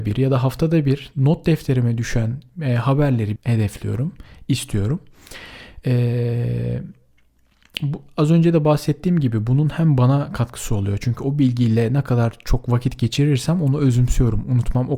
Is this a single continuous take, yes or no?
no